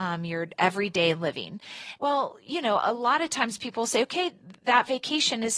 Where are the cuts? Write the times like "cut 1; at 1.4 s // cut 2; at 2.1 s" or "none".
cut 1; at 2.0 s